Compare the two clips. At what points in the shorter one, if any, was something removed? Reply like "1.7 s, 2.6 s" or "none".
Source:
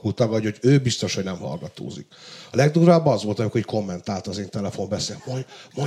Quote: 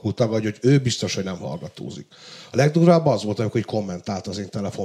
none